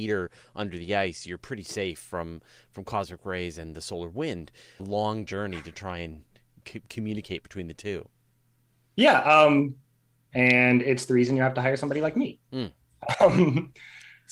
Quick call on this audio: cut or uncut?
cut